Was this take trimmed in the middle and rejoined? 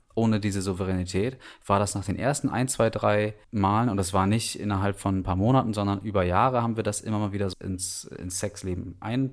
yes; 2 cuts; at 3.4 s, 7.5 s

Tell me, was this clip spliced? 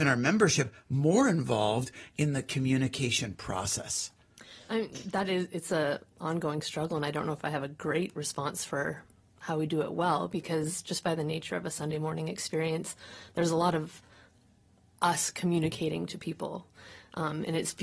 no; 0 cuts

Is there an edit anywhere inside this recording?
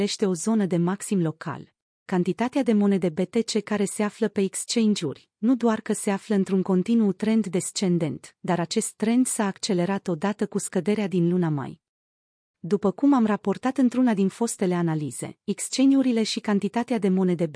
yes; 2 cuts; at 2.1 s, 12.5 s

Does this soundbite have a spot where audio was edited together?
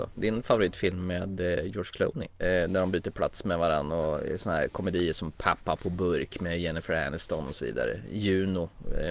yes; 1 cut; at 2.4 s

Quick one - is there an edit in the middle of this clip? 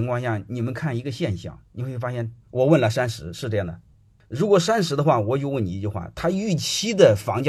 yes; 1 cut; at 2.4 s

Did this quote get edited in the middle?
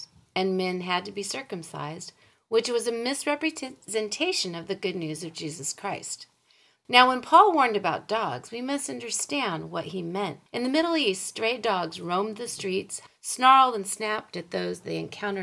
yes; 3 cuts; at 6.8 s, 10.5 s, 13.1 s

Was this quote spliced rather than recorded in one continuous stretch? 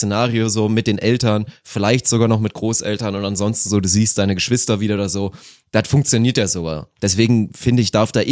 no; 0 cuts

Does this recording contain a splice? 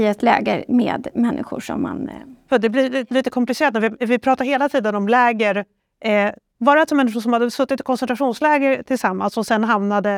no; 0 cuts

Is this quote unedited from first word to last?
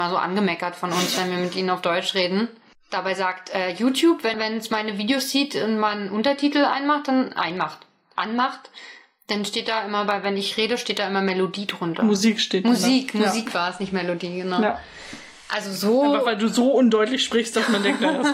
no; 1 cut; at 4.3 s

